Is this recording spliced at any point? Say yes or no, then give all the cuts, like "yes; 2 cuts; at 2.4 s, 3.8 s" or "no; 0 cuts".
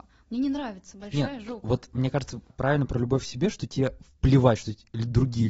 no; 0 cuts